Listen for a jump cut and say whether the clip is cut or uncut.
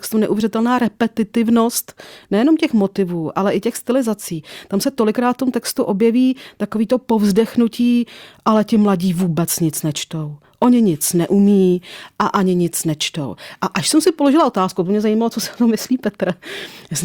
uncut